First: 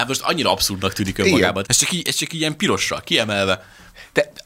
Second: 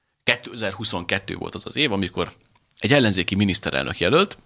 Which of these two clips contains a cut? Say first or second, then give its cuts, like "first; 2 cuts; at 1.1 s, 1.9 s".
first; 1 cut; at 1.6 s